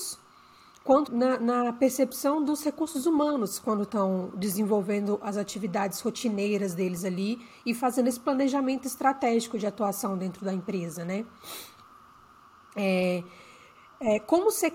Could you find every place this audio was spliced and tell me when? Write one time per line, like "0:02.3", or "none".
0:01.1